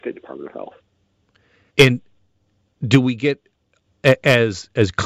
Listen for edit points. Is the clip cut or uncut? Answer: cut